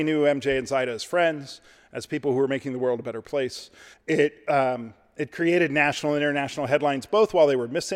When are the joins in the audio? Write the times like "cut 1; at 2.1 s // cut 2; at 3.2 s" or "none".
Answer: cut 1; at 3.9 s